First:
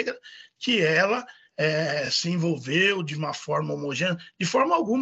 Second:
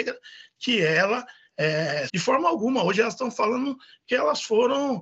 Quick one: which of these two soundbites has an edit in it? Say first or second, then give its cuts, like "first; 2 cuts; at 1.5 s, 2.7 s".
second; 1 cut; at 2.1 s